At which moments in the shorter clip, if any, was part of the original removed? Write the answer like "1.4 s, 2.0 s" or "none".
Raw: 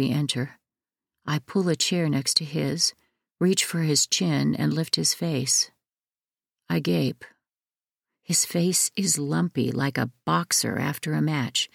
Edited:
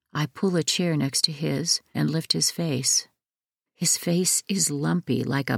1.9 s, 3.7 s